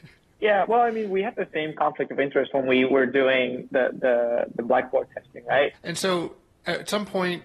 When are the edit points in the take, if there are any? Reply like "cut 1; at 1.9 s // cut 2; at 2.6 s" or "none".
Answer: cut 1; at 5.7 s